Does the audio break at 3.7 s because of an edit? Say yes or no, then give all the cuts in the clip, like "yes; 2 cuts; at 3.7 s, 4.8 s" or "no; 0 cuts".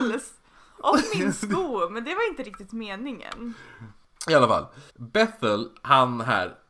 no; 1 cut; at 4.9 s